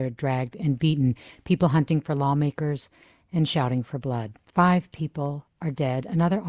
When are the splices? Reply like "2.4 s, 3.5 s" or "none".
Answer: none